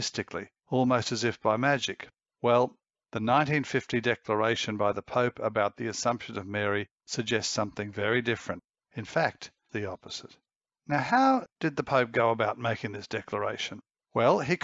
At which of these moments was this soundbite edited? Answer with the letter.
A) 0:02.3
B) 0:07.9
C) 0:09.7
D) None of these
C